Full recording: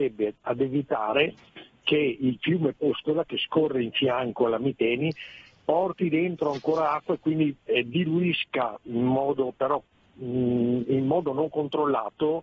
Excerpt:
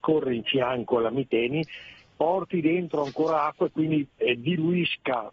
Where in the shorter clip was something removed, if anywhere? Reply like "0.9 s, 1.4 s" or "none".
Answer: none